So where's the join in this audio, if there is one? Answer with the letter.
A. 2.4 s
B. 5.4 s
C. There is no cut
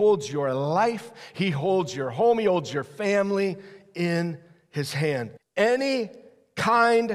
B